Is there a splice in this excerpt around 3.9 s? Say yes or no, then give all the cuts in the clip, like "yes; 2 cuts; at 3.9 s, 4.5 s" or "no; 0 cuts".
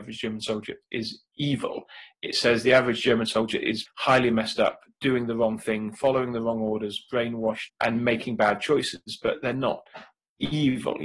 yes; 2 cuts; at 3.9 s, 7.7 s